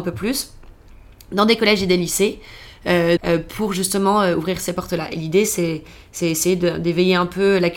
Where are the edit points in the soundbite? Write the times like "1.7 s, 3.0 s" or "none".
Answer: 3.2 s